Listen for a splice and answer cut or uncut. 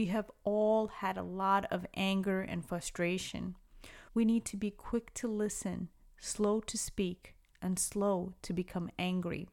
cut